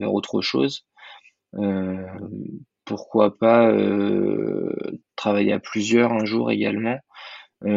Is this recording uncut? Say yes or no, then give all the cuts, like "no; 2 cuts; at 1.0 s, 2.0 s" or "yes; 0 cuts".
yes; 0 cuts